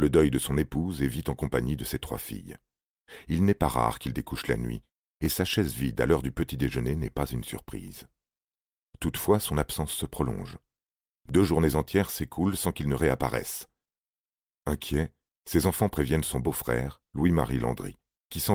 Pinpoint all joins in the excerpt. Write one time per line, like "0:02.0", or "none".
none